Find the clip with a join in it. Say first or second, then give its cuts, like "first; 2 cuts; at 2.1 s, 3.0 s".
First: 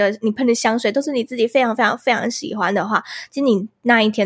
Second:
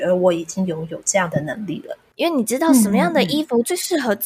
second; 1 cut; at 2.1 s